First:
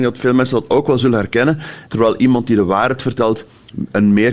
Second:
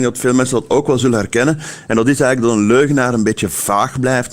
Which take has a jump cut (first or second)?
first